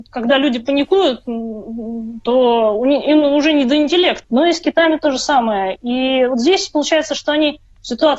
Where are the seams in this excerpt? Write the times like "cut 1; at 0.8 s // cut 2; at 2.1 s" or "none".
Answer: cut 1; at 4.2 s